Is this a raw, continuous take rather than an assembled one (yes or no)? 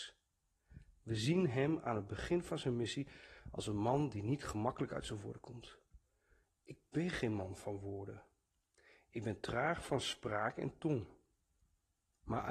yes